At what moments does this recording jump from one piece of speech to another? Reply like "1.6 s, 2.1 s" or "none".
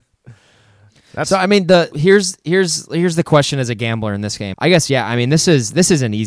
1.9 s, 4.5 s